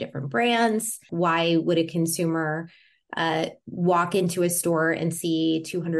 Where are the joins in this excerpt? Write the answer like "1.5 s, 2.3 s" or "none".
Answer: 1.1 s